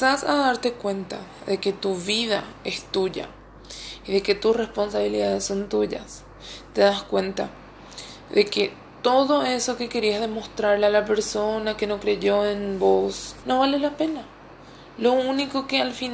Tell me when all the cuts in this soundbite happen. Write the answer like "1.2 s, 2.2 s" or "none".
13.4 s